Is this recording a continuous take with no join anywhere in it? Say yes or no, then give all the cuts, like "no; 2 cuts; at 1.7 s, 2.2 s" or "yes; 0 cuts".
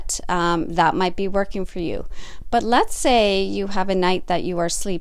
yes; 0 cuts